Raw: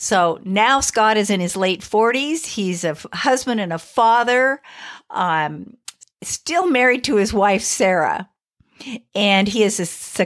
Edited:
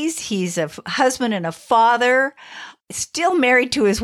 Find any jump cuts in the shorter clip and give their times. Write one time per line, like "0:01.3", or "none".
0:02.8